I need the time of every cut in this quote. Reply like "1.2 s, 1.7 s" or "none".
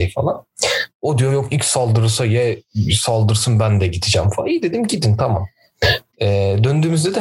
6.1 s

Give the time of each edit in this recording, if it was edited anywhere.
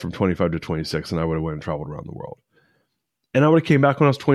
none

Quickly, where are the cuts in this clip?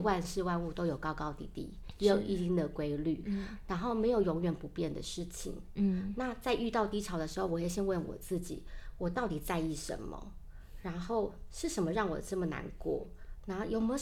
none

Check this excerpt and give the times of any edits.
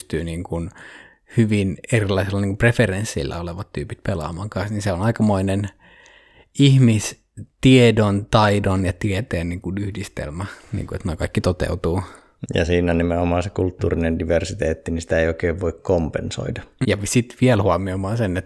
12.4 s, 16.8 s

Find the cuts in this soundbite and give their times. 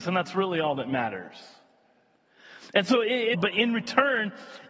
3.3 s

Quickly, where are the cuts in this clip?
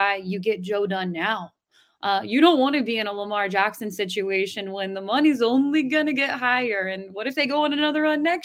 none

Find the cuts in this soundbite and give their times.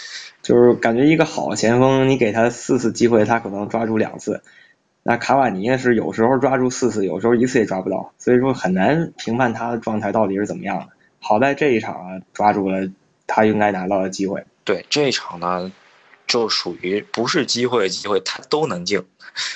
12.3 s

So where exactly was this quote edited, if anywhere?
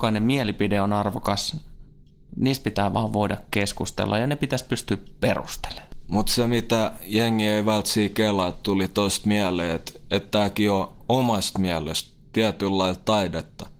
none

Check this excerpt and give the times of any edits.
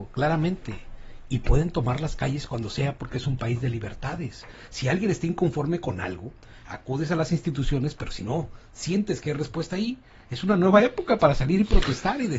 none

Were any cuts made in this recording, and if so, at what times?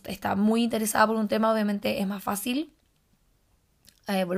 none

